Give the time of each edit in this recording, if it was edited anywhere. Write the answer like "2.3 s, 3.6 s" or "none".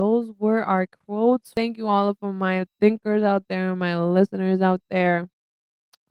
none